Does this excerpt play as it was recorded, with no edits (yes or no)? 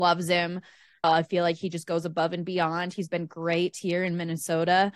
no